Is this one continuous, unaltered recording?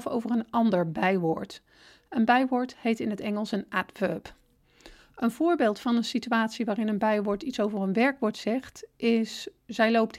yes; 0 cuts

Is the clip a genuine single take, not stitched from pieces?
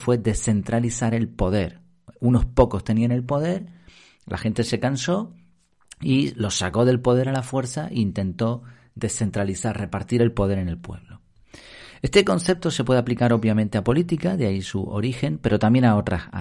yes; 0 cuts

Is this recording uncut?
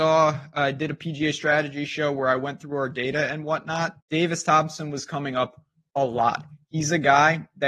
no; 1 cut; at 4.0 s

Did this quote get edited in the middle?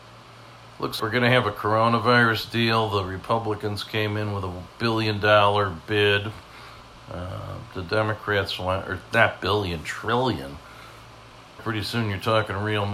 yes; 2 cuts; at 1.0 s, 11.6 s

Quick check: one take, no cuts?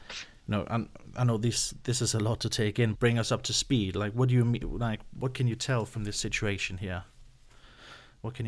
no; 1 cut; at 2.9 s

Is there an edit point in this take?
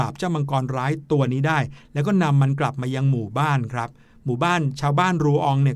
no; 0 cuts

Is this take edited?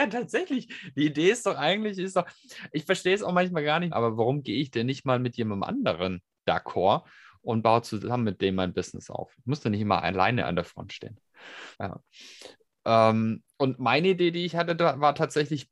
yes; 2 cuts; at 3.9 s, 11.7 s

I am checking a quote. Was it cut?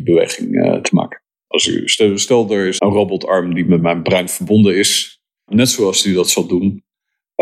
yes; 3 cuts; at 1.5 s, 2.8 s, 5.5 s

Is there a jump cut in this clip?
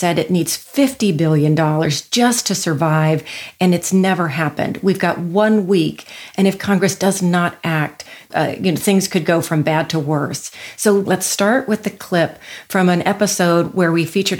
yes; 2 cuts; at 8.3 s, 11.1 s

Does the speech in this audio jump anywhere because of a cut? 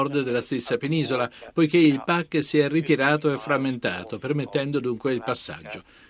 no; 0 cuts

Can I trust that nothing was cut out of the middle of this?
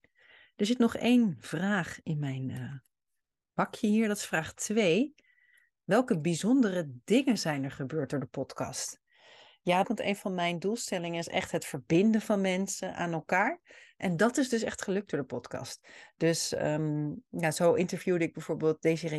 no; 1 cut; at 9.8 s

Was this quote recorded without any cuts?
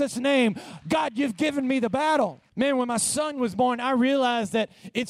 no; 1 cut; at 2.5 s

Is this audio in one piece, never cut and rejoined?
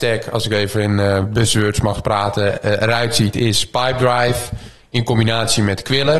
yes; 0 cuts

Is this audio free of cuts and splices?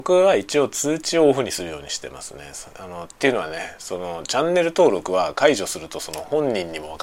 no; 1 cut; at 3.1 s

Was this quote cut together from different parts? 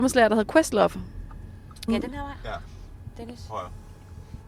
yes; 1 cut; at 1.9 s

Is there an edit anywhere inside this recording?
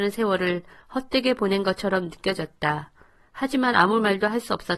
no; 0 cuts

